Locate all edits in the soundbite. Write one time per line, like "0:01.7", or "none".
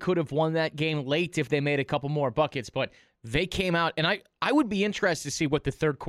none